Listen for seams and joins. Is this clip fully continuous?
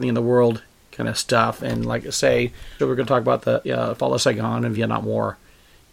no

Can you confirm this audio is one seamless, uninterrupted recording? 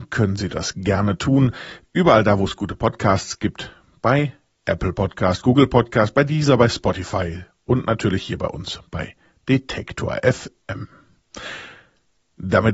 yes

